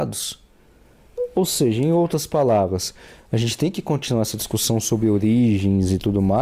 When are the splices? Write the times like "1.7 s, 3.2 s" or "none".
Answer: none